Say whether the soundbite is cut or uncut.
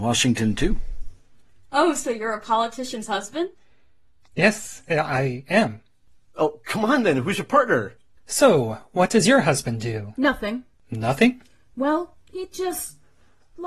cut